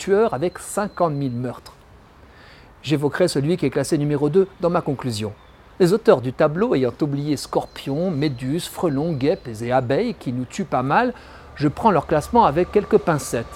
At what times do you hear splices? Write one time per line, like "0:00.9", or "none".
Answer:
none